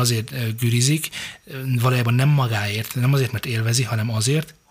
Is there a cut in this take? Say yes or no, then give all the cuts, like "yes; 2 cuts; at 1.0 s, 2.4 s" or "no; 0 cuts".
no; 0 cuts